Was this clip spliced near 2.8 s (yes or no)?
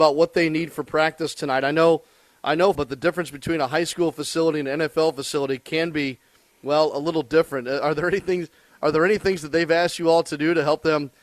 yes